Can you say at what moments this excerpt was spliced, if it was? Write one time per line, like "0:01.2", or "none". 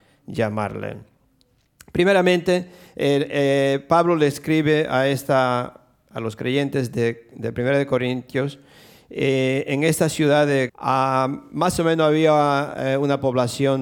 0:10.7

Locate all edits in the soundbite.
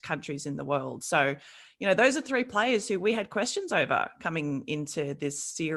none

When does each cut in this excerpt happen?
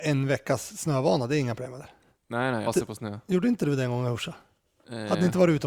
0:02.7

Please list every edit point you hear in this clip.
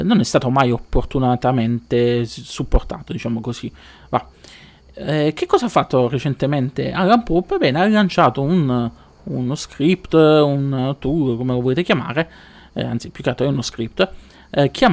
none

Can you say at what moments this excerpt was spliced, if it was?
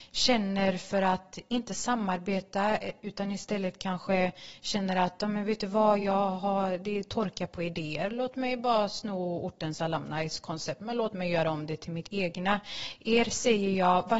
none

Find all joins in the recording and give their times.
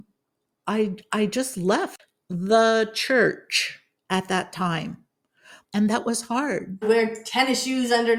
0:05.6
0:06.8

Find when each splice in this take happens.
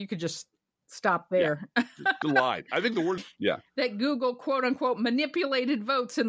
0:03.2

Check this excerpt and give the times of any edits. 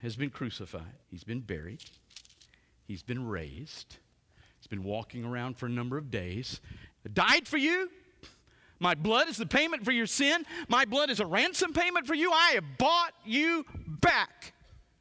0:01.0
0:06.9

